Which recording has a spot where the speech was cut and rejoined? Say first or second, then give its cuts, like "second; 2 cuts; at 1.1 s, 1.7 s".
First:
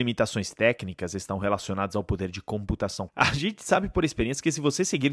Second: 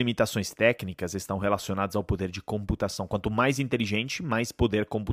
first; 1 cut; at 3.1 s